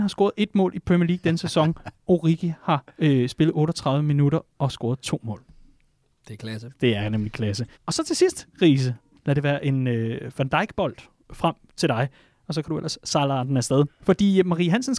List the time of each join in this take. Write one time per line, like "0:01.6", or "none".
0:07.7
0:09.2
0:13.9

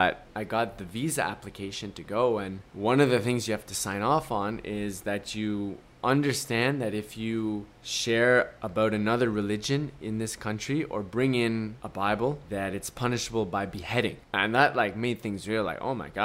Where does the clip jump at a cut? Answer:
0:02.7
0:07.7

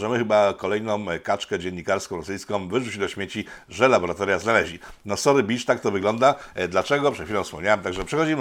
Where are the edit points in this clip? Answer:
none

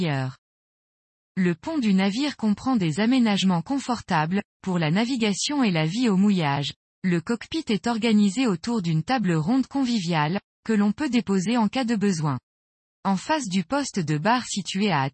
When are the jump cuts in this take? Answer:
0:06.8

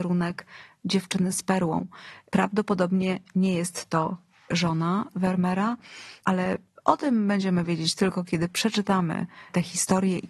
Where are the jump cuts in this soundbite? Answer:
none

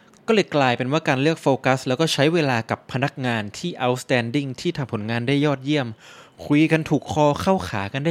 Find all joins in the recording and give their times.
none

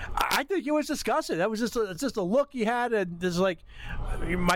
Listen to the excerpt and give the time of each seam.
none

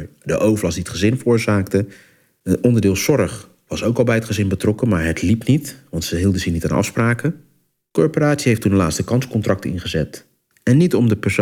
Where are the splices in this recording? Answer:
none

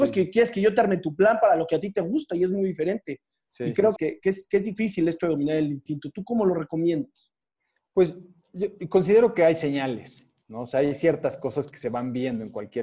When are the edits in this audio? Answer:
0:04.0

